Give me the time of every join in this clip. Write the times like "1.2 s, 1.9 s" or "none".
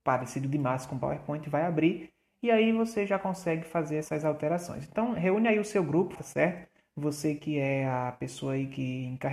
6.2 s